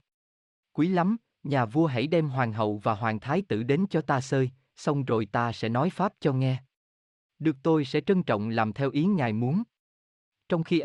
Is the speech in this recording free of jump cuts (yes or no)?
yes